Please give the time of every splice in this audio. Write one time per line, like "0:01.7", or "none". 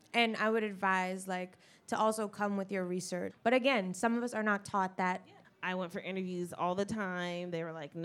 0:03.3
0:05.4